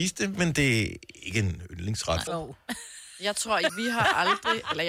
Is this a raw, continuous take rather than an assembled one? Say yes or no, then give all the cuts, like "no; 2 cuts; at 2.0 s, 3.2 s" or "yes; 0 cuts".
no; 2 cuts; at 2.3 s, 3.7 s